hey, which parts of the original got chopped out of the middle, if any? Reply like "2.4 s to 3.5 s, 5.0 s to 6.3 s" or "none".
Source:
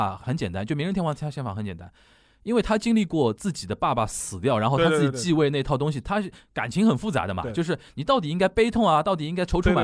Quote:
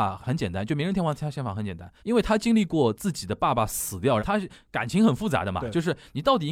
2.0 s to 2.4 s, 4.6 s to 6.0 s